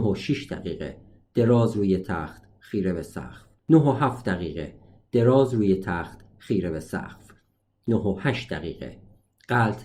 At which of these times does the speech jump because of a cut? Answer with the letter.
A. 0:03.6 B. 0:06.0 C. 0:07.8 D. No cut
A